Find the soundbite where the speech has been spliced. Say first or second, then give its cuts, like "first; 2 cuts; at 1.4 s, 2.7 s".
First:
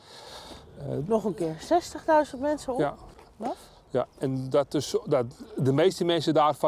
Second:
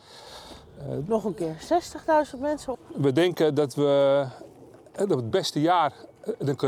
second; 1 cut; at 2.7 s